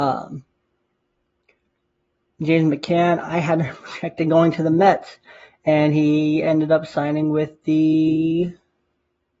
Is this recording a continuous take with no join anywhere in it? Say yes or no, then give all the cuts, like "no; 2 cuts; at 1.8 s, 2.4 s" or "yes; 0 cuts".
yes; 0 cuts